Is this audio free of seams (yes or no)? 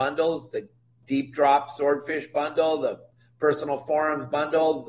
yes